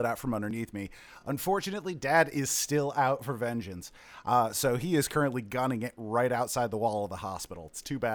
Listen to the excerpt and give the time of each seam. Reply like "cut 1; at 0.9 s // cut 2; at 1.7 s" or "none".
none